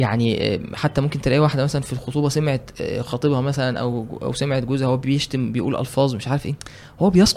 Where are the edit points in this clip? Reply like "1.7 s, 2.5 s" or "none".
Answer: none